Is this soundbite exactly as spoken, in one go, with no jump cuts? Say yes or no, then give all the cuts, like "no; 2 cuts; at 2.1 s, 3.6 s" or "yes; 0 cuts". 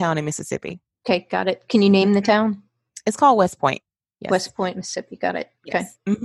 yes; 0 cuts